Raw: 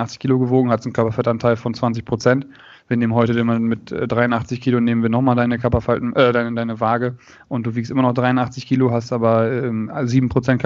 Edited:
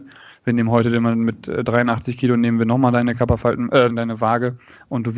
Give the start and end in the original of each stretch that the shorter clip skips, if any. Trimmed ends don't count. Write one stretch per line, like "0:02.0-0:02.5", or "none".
0:06.3-0:06.5